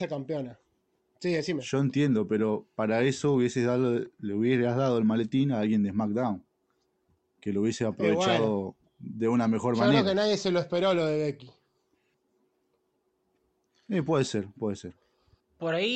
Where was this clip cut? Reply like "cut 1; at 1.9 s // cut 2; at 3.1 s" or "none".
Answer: none